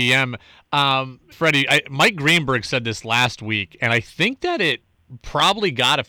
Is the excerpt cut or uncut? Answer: cut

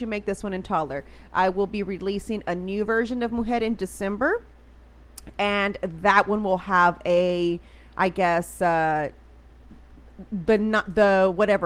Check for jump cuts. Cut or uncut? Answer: uncut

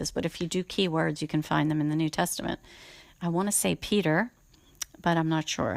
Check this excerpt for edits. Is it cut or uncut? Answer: uncut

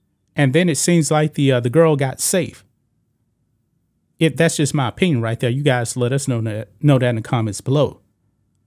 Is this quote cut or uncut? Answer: uncut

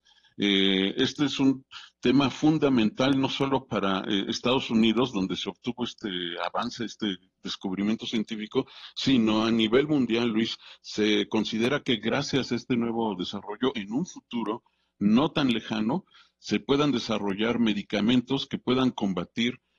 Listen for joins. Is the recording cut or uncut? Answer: uncut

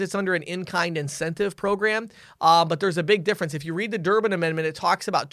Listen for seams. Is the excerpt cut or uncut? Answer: uncut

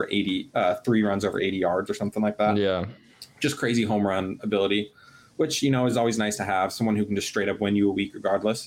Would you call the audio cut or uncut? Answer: uncut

